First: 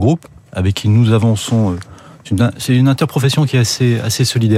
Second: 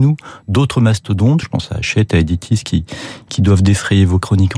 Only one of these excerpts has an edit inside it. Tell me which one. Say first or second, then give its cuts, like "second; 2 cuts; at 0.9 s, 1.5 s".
second; 1 cut; at 1.4 s